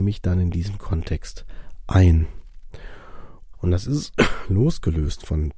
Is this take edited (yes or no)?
yes